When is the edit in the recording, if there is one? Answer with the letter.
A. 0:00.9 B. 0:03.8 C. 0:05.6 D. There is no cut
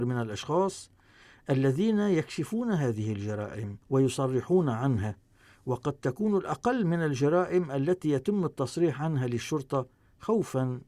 B